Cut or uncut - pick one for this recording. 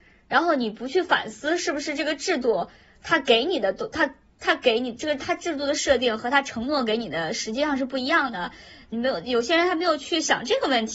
uncut